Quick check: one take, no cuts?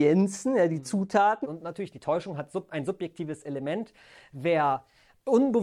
no; 1 cut; at 1.4 s

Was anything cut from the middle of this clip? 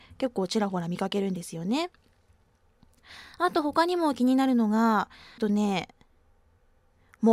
yes; 1 cut; at 5.4 s

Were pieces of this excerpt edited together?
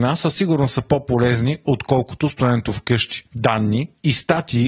no; 0 cuts

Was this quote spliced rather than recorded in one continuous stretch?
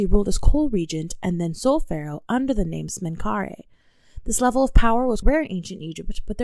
yes; 1 cut; at 5.2 s

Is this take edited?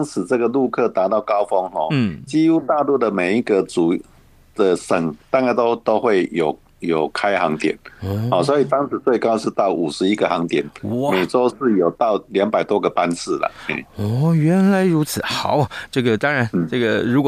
no; 0 cuts

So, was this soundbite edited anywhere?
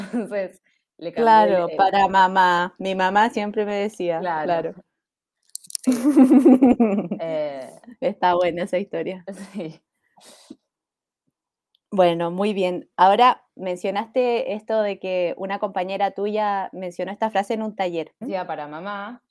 yes; 2 cuts; at 13.5 s, 18.2 s

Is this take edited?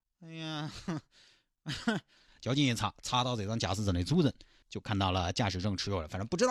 yes; 2 cuts; at 2.3 s, 4.6 s

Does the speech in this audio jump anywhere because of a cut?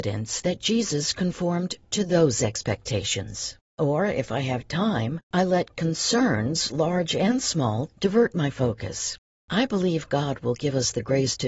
yes; 1 cut; at 3.7 s

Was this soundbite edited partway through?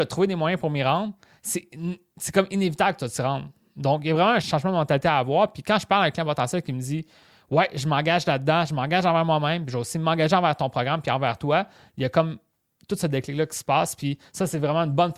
no; 0 cuts

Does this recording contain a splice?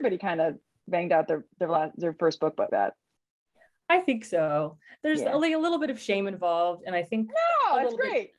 yes; 1 cut; at 2.7 s

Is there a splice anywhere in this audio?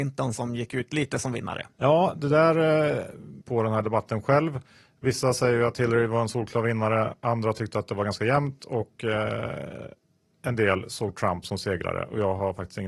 yes; 2 cuts; at 1.7 s, 3.4 s

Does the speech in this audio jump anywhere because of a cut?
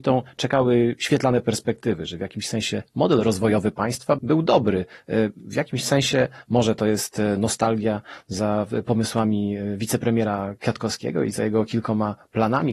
yes; 1 cut; at 4.2 s

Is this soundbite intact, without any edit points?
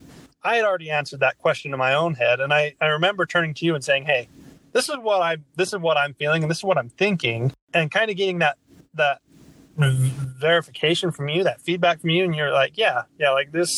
yes; 0 cuts

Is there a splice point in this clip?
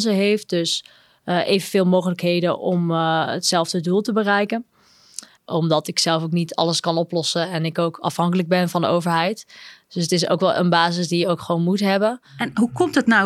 yes; 1 cut; at 5.4 s

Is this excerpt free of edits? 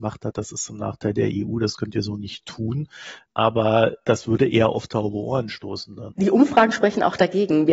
yes; 0 cuts

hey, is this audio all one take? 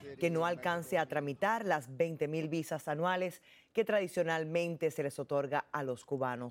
yes; 0 cuts

